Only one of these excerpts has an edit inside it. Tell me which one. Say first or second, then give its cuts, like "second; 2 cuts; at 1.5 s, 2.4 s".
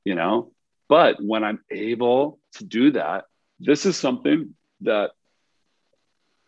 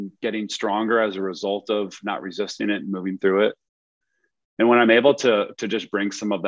first; 1 cut; at 3.5 s